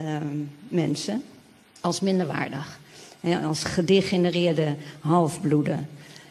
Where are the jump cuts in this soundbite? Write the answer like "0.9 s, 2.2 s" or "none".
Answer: none